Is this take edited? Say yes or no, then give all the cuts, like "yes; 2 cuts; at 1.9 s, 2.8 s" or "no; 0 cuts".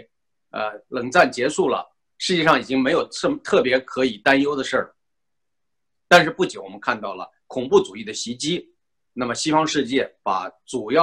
yes; 1 cut; at 9.0 s